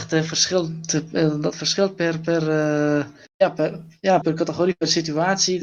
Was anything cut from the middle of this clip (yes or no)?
yes